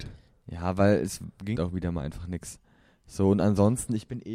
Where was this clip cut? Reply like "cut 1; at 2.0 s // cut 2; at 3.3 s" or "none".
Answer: cut 1; at 1.6 s